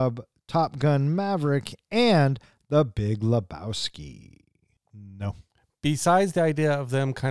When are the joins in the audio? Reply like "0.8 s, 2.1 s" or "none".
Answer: 4.8 s